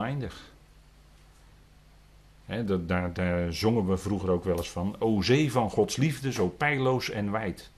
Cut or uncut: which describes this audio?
uncut